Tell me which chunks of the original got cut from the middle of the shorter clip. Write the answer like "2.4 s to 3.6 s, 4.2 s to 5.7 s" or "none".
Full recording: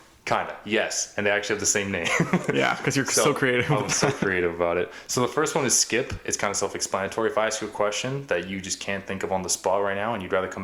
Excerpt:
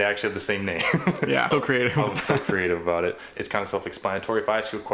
2.8 s to 3.2 s, 5.1 s to 6.2 s